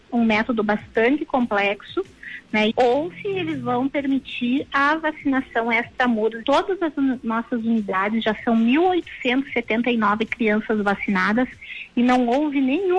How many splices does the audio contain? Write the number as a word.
two